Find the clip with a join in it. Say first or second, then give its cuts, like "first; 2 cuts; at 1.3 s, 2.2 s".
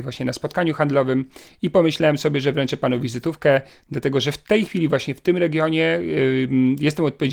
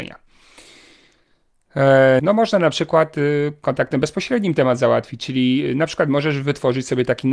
second; 1 cut; at 2.2 s